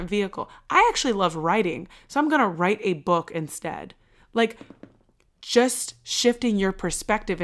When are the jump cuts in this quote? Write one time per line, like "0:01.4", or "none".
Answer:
none